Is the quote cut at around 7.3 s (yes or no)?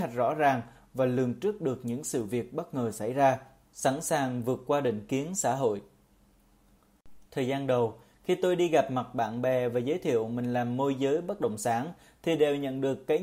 yes